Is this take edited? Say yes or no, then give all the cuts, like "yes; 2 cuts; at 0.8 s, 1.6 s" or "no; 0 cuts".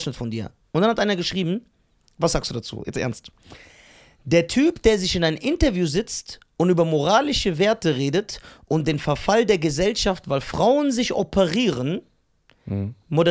no; 0 cuts